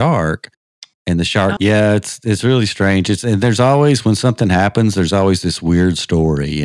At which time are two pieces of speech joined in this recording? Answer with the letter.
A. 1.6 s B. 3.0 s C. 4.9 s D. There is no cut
A